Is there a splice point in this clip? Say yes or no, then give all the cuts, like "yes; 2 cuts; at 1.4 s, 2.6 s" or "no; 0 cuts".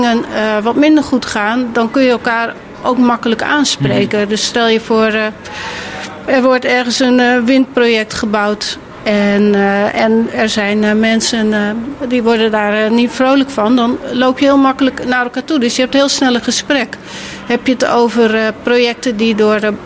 no; 0 cuts